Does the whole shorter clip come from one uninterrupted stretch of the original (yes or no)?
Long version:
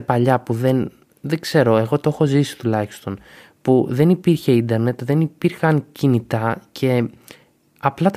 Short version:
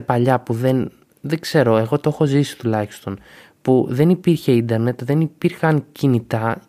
yes